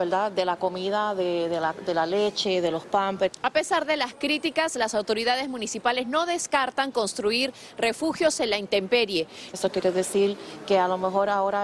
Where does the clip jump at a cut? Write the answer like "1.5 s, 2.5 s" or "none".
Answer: 9.5 s